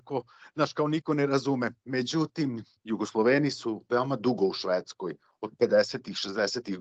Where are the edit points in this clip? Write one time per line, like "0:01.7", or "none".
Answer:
0:02.8